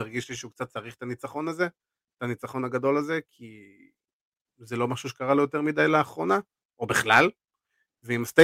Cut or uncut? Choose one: uncut